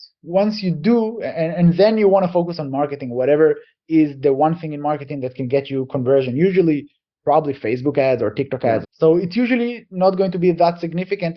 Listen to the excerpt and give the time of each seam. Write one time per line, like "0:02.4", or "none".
0:08.8